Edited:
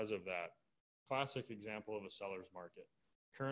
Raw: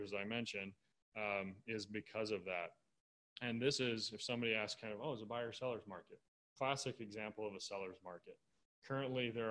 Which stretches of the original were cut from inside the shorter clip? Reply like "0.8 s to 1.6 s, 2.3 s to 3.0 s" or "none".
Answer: 3.1 s to 6.4 s